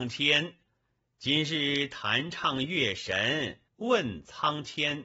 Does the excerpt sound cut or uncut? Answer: cut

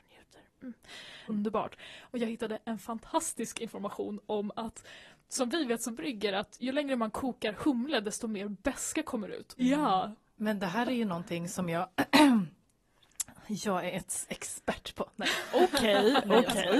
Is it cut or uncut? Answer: cut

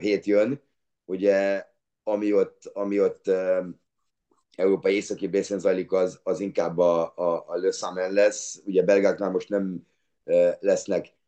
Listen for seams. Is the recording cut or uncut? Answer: uncut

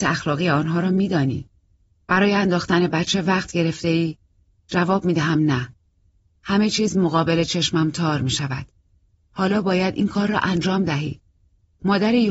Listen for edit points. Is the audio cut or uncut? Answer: uncut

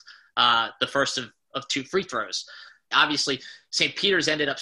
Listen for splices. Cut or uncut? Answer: cut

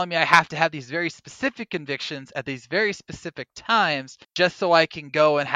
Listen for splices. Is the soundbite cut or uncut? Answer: cut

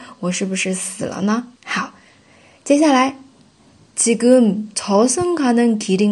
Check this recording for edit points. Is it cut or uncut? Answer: cut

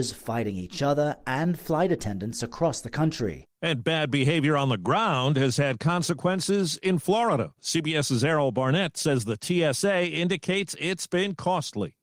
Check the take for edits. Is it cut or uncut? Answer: cut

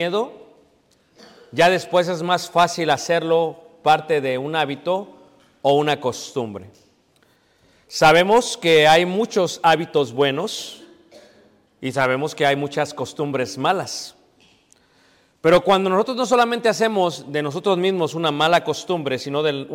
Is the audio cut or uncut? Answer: uncut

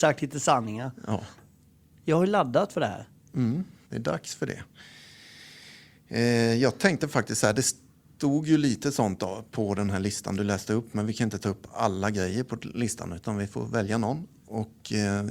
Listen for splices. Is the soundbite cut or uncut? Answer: cut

